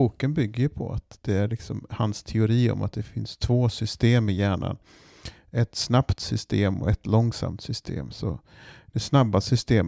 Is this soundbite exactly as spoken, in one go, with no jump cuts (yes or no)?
yes